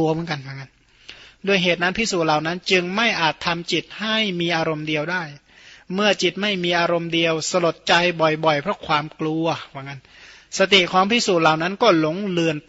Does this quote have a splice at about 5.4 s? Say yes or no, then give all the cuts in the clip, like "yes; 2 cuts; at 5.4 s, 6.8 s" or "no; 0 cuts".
no; 0 cuts